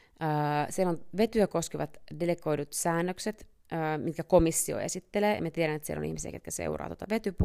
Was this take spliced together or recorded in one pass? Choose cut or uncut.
uncut